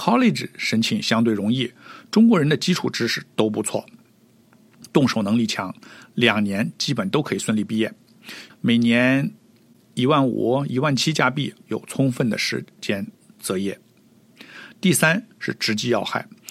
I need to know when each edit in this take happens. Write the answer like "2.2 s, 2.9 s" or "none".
8.5 s, 11.6 s